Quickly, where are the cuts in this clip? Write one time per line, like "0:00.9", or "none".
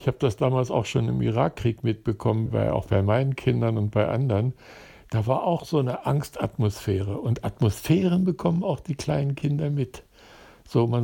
0:02.5